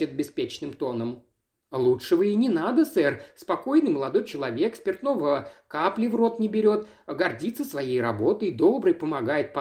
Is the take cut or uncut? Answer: uncut